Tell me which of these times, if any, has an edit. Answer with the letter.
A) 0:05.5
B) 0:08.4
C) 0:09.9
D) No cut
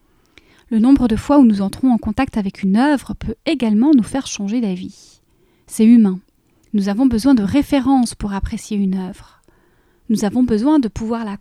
D